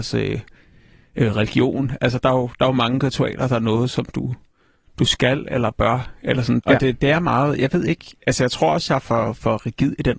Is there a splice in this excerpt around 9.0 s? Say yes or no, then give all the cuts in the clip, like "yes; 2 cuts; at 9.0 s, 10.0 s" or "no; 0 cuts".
no; 1 cut; at 6.6 s